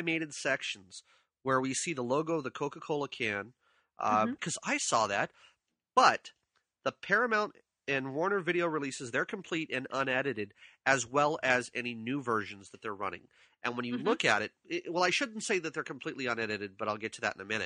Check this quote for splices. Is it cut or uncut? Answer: cut